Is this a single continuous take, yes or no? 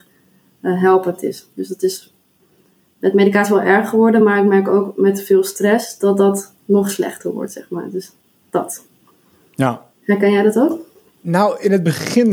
yes